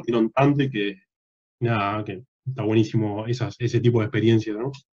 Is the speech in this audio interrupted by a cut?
no; 0 cuts

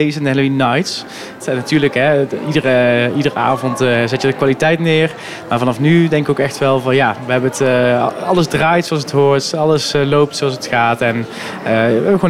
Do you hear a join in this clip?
yes; 1 cut; at 1.4 s

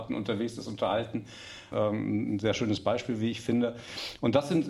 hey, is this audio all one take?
no; 1 cut; at 1.7 s

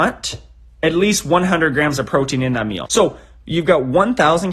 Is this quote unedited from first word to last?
no; 1 cut; at 2.8 s

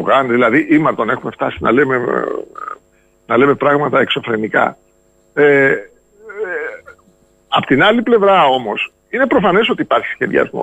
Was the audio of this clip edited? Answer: no; 0 cuts

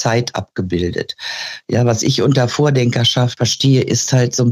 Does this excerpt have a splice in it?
no; 0 cuts

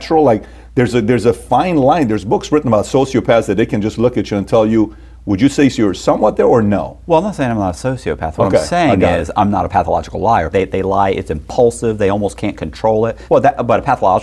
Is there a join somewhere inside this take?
yes; 2 cuts; at 10.5 s, 13.3 s

